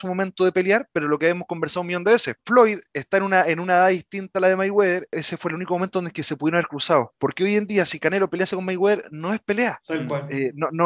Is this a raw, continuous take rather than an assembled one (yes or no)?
yes